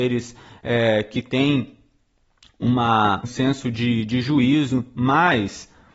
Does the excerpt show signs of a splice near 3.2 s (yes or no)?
yes